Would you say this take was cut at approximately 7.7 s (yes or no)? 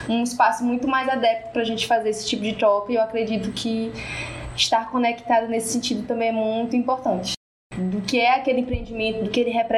yes